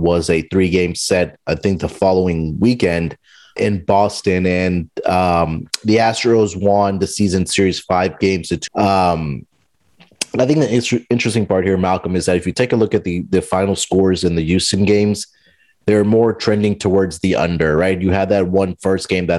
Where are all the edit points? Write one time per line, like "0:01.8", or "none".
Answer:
0:03.6
0:08.7